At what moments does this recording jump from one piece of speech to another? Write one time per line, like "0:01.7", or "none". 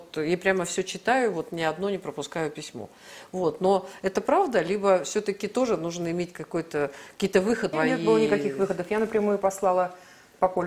0:07.7